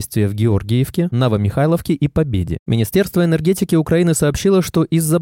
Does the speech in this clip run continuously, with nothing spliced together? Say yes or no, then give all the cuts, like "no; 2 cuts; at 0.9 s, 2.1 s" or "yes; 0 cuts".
no; 1 cut; at 2.6 s